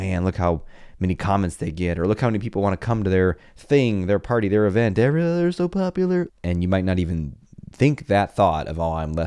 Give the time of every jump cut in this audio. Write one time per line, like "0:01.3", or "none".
0:06.3